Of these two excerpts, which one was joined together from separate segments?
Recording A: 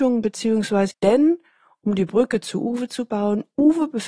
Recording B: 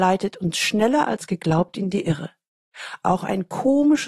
A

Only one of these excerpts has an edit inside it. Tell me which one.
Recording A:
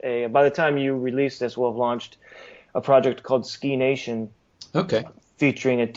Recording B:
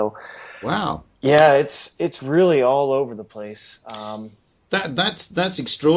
B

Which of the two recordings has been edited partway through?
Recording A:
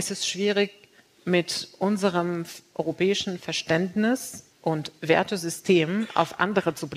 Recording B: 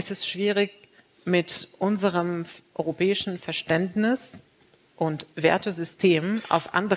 A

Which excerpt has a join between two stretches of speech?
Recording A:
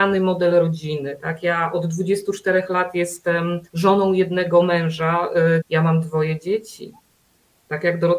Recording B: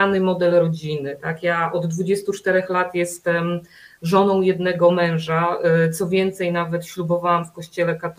A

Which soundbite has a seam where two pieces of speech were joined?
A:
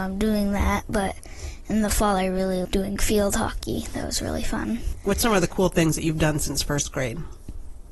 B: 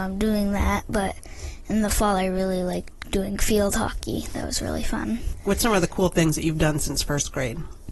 A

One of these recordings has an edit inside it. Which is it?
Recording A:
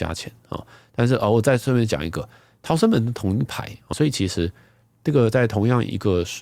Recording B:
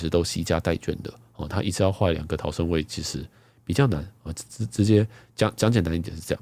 A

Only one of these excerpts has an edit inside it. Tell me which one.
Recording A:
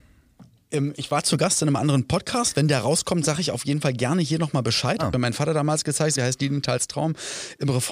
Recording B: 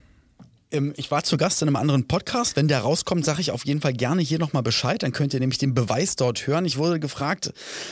A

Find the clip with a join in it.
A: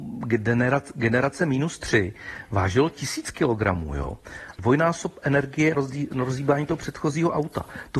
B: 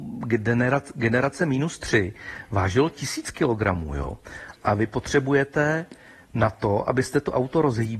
A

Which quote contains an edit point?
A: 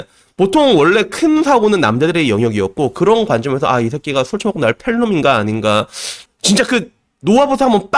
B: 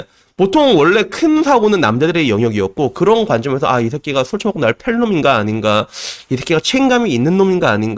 A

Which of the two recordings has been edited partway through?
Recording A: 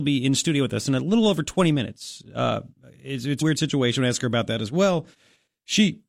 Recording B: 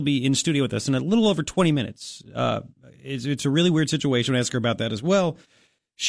A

